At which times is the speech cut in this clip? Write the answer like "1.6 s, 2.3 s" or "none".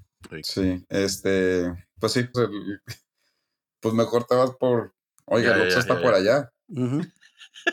2.3 s